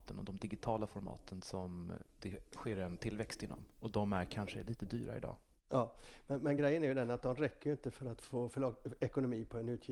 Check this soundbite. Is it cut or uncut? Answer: uncut